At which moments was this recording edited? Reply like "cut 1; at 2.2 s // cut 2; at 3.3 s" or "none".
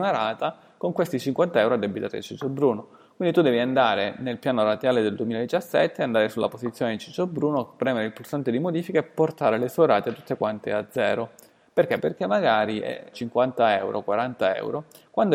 cut 1; at 12.0 s // cut 2; at 13.1 s

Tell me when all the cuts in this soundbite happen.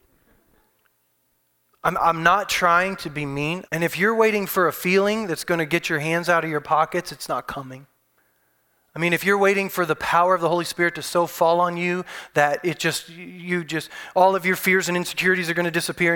cut 1; at 3.6 s

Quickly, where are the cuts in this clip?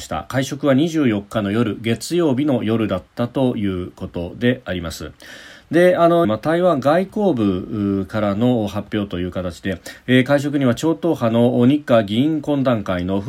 cut 1; at 6.2 s

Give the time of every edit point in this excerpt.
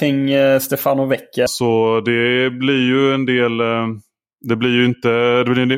cut 1; at 1.5 s // cut 2; at 4.3 s

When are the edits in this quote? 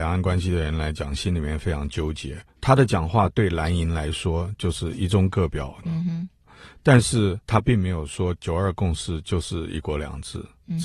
cut 1; at 2.5 s // cut 2; at 5.8 s

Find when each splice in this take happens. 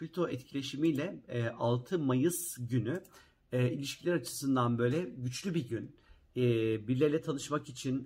none

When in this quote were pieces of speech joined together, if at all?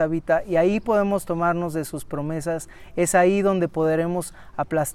none

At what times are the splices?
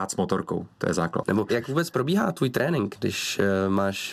cut 1; at 1.2 s

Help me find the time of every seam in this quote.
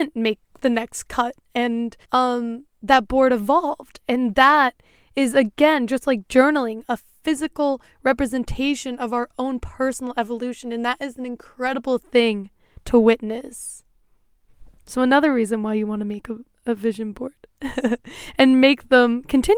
cut 1; at 2.0 s

